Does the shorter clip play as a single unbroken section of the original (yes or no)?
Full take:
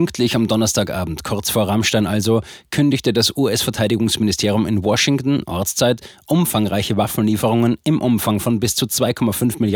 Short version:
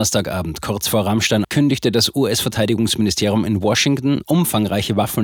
no